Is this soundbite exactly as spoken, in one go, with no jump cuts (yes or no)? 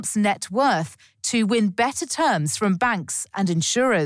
yes